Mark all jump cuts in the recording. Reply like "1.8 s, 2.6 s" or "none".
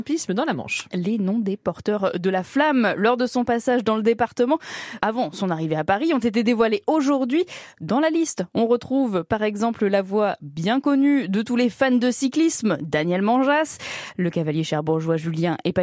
5.0 s

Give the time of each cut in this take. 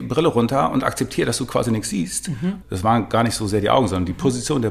2.6 s

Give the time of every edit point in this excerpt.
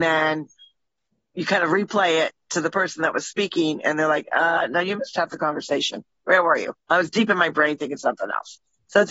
1.3 s, 6.8 s

